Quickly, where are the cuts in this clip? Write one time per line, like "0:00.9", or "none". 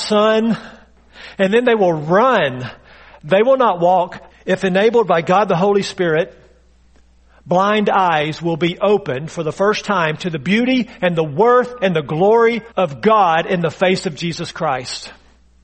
0:04.3
0:12.7